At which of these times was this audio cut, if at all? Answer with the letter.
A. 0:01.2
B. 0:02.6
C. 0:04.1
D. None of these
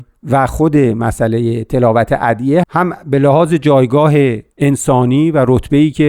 B